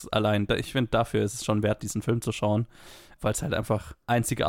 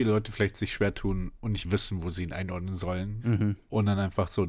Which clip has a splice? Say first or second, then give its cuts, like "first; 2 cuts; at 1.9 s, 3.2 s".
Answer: second; 1 cut; at 1.6 s